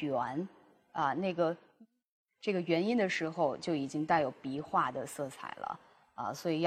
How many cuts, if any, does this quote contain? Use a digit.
0